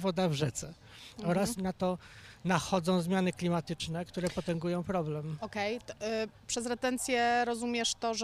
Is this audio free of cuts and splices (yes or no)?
no